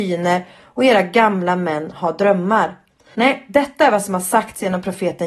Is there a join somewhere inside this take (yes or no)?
yes